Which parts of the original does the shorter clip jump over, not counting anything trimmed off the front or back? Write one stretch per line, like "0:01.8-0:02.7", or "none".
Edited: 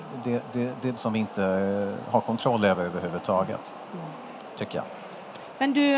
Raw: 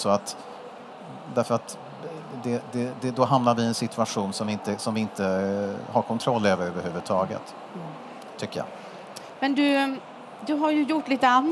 0:03.2-0:04.8